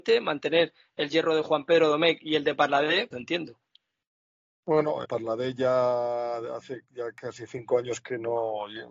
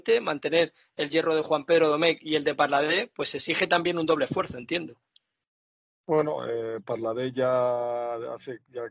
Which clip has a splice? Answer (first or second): first